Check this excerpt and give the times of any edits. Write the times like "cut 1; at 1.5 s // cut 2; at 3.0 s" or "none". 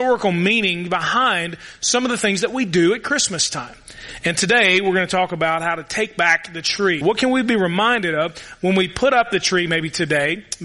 cut 1; at 7.0 s